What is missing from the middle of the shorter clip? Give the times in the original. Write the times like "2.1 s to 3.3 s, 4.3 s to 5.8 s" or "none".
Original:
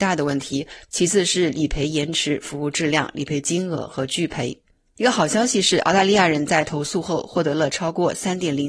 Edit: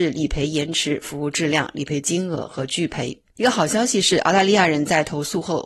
4.7 s to 4.9 s